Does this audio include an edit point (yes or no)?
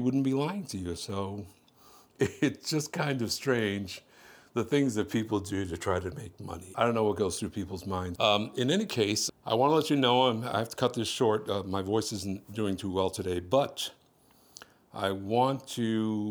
yes